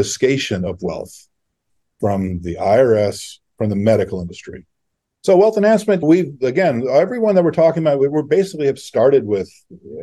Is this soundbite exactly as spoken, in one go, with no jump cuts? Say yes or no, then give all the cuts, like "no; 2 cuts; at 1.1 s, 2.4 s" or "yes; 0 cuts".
no; 2 cuts; at 3.5 s, 5.1 s